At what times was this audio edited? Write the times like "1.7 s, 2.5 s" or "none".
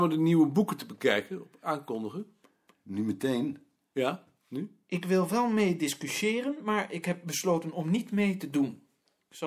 none

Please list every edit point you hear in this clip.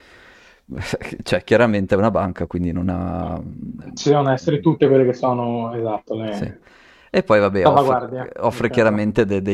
none

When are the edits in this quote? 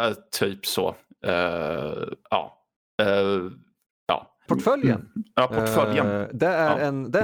4.5 s

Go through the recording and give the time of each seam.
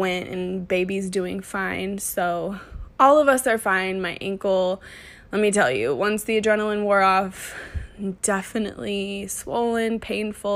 none

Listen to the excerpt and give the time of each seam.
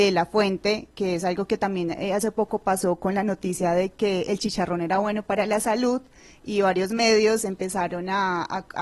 none

